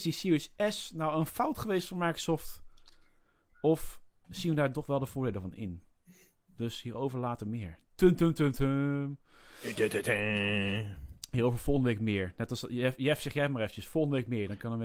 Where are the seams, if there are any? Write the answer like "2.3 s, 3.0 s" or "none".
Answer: none